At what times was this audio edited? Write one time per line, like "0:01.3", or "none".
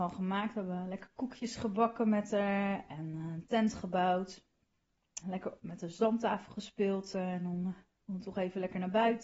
0:05.2
0:07.1